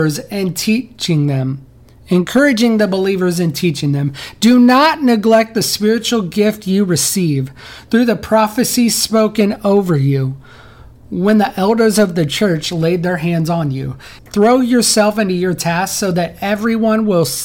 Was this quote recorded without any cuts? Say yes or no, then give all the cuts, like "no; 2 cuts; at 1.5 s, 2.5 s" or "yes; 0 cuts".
no; 1 cut; at 14.2 s